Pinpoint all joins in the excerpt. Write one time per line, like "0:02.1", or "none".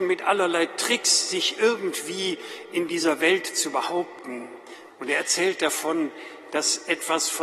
0:04.9